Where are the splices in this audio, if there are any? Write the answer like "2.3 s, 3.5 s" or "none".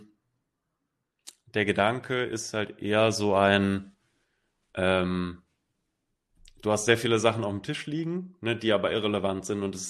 none